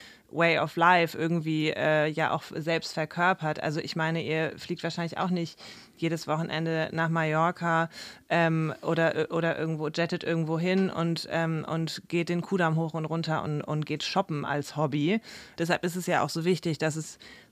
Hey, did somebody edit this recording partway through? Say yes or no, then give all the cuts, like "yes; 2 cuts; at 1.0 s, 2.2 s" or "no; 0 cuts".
yes; 1 cut; at 15.6 s